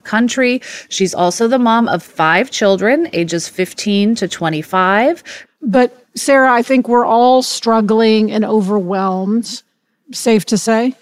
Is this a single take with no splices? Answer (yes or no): no